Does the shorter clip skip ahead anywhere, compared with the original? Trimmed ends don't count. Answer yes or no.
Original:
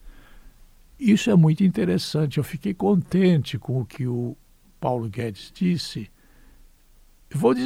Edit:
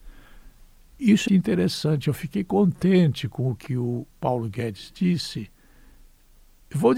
yes